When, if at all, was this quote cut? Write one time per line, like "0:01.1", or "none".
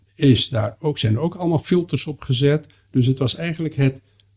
none